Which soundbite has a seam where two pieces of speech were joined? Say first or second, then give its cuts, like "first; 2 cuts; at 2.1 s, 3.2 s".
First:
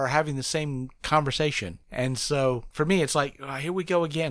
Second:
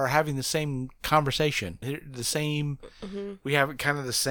second; 1 cut; at 1.8 s